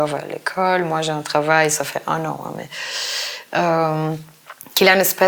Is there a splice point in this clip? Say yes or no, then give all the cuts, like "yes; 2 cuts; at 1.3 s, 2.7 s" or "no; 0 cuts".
no; 0 cuts